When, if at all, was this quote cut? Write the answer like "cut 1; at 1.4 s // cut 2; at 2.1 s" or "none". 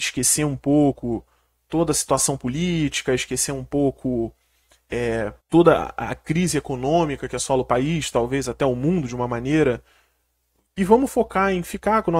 cut 1; at 5.4 s